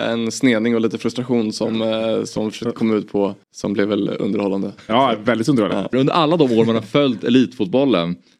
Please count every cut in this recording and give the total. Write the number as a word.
two